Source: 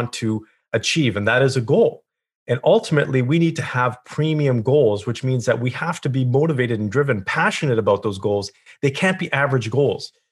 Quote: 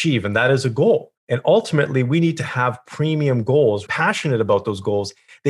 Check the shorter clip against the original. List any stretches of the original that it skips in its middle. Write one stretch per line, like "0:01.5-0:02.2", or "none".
0:02.1-0:02.4
0:05.0-0:07.2